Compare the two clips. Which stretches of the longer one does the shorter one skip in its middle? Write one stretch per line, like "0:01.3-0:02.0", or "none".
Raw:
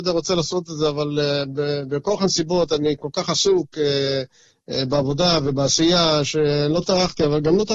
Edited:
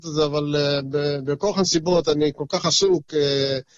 none